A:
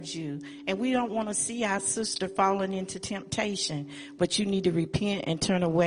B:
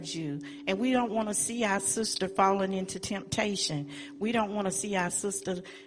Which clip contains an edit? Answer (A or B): A